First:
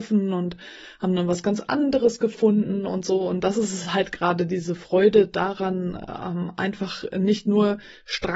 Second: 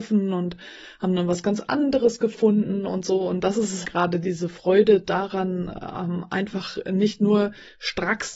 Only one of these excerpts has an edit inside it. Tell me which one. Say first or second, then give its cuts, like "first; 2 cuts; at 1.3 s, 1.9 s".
second; 1 cut; at 3.8 s